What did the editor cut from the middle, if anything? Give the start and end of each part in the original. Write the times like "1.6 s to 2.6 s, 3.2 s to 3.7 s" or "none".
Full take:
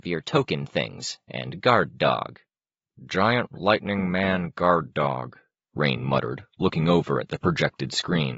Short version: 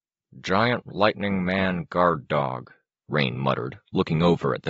none